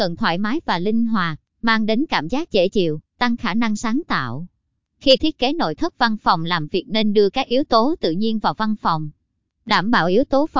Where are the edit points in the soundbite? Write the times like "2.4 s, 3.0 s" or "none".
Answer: none